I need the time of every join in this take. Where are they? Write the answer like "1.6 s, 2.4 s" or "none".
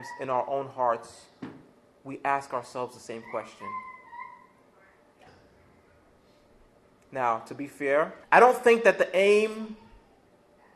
5.3 s, 8.2 s